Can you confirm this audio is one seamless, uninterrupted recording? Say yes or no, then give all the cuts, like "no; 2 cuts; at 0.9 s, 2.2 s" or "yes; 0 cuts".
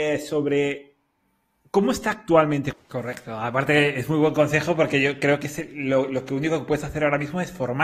no; 1 cut; at 2.7 s